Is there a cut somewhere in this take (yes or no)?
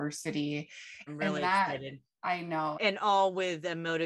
yes